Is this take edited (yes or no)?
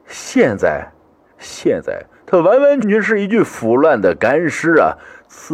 yes